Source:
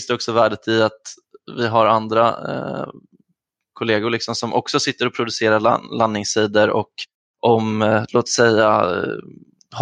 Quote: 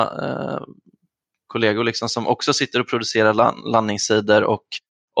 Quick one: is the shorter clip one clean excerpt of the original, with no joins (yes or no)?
yes